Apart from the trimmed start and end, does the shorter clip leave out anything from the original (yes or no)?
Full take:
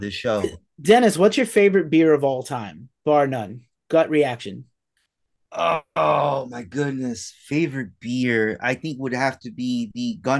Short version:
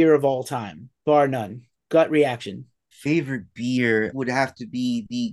yes